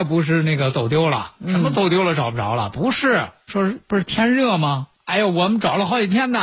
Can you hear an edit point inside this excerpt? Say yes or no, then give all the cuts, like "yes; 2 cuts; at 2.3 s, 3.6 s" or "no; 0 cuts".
yes; 2 cuts; at 3.5 s, 4.9 s